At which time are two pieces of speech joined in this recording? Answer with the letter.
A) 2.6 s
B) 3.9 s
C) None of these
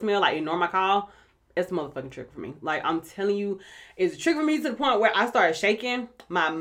C